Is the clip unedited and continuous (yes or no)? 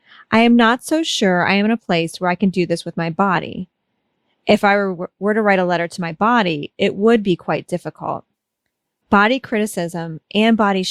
yes